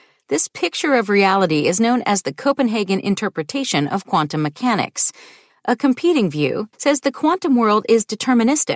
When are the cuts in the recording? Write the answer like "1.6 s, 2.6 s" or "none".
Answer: 5.5 s, 6.7 s

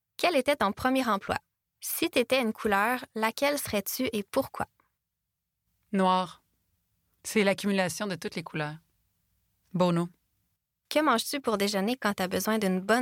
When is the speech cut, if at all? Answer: 1.6 s, 9.6 s

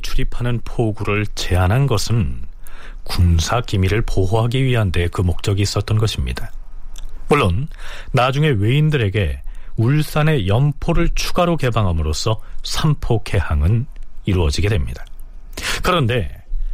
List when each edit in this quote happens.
none

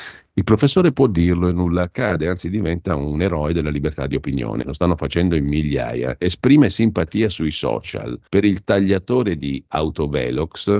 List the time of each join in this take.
4.6 s, 8.3 s

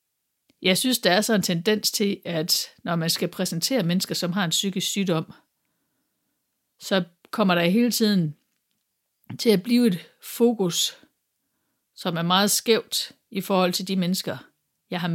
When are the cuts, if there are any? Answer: none

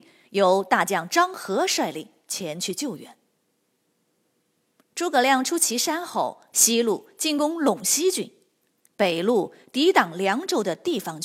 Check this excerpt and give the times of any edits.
6.5 s

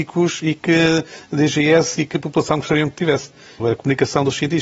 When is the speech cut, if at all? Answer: 3.6 s

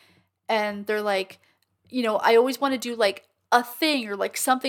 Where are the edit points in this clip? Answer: none

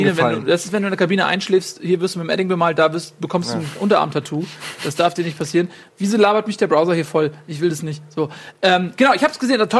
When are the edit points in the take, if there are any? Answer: none

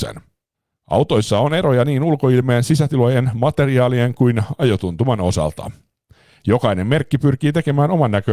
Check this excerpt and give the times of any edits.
none

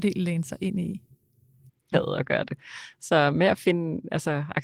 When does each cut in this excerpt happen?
1.9 s

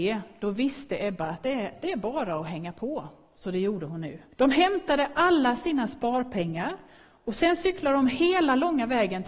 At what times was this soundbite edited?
4.3 s

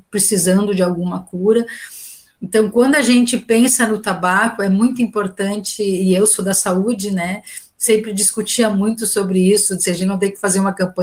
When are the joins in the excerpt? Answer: none

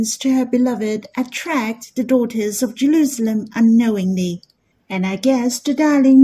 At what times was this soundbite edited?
4.7 s

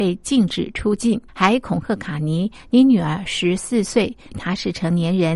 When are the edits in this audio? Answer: 1.3 s, 4.3 s

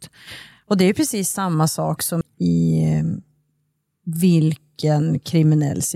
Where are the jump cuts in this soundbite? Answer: 2.2 s

